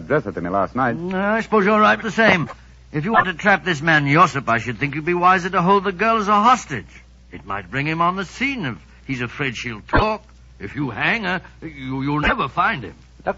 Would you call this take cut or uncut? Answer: cut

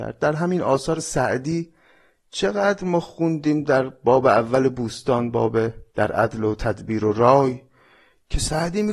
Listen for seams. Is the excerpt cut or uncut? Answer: cut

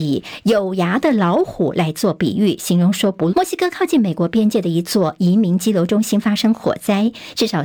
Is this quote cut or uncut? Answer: cut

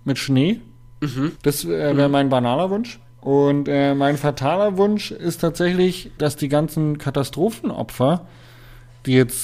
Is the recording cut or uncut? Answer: cut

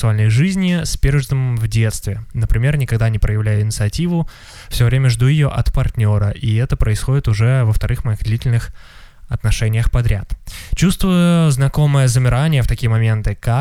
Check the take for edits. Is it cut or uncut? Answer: uncut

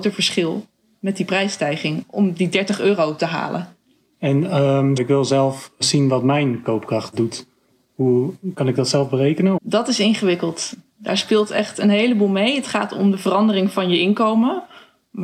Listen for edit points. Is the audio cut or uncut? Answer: cut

